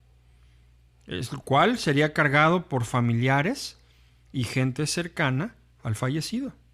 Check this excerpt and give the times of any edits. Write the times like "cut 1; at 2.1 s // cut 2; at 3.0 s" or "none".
none